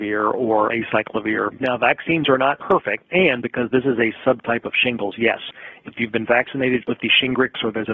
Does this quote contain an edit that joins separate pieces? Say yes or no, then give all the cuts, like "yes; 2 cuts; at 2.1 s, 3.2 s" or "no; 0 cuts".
yes; 2 cuts; at 1.6 s, 3.1 s